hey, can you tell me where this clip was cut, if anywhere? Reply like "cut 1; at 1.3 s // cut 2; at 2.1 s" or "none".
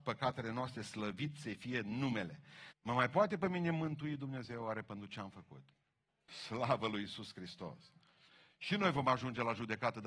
cut 1; at 2.7 s // cut 2; at 6.1 s